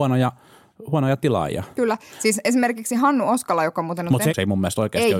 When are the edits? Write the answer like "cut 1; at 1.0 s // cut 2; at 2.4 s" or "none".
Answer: cut 1; at 4.3 s

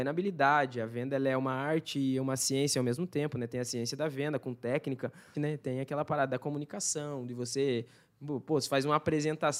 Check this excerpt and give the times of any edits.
cut 1; at 5.3 s

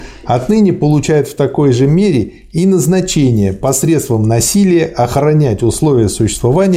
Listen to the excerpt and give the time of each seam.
none

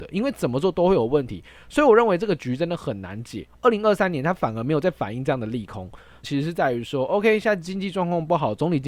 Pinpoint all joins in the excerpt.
cut 1; at 3.5 s // cut 2; at 6.2 s

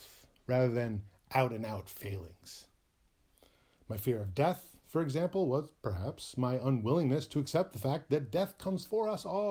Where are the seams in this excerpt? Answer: none

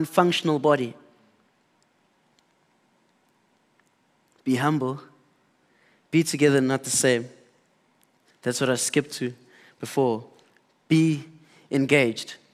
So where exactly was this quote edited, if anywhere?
cut 1; at 8.3 s

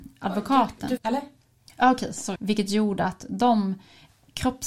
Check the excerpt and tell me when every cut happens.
cut 1; at 1.0 s // cut 2; at 2.4 s

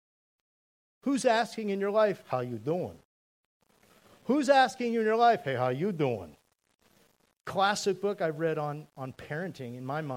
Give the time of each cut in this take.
cut 1; at 7.4 s

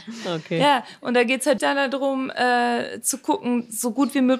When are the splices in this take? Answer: cut 1; at 1.6 s

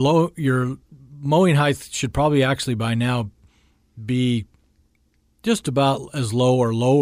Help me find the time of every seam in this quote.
none

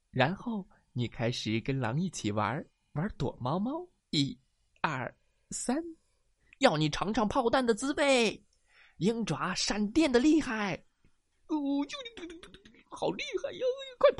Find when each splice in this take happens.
cut 1; at 4.0 s // cut 2; at 6.5 s

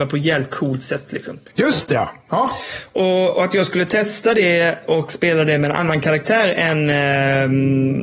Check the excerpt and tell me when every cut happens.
cut 1; at 1.5 s

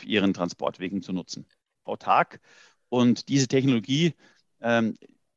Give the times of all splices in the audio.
cut 1; at 1.9 s

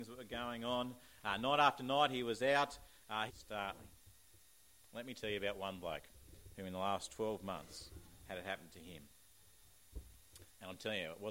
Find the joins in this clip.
cut 1; at 3.3 s

